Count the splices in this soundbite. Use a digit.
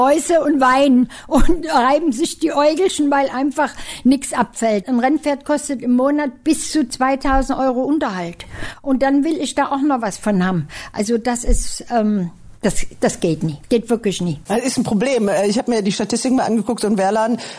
1